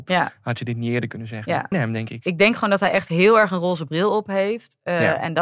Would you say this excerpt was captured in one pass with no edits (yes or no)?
no